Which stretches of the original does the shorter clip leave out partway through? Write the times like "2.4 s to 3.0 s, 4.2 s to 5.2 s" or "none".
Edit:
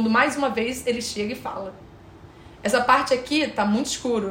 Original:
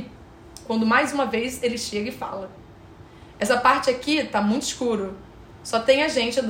none